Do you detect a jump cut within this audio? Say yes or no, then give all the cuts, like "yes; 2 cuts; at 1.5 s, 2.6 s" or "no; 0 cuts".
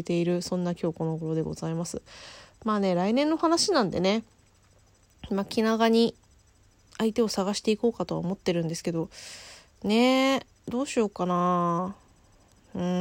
no; 0 cuts